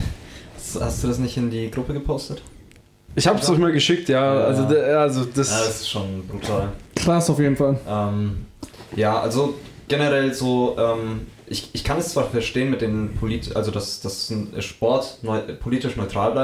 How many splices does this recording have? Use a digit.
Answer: 0